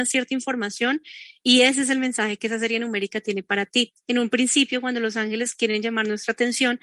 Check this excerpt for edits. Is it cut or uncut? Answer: uncut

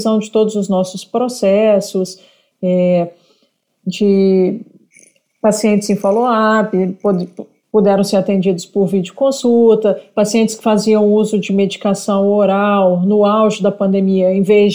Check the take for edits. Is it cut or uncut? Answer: uncut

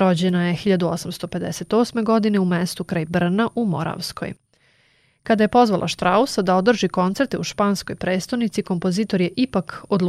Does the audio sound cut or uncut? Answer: uncut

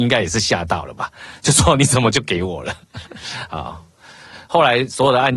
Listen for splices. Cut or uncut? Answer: uncut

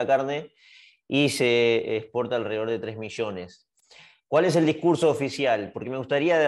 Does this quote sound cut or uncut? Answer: uncut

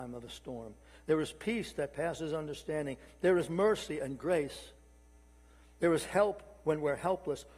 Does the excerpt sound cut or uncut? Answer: uncut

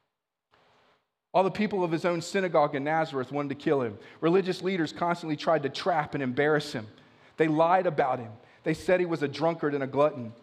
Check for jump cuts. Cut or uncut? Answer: uncut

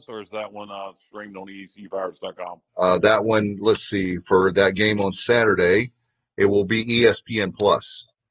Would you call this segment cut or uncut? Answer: cut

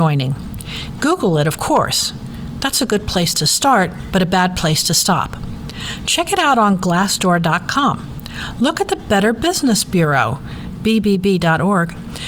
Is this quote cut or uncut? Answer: uncut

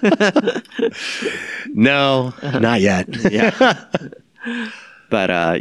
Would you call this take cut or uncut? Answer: uncut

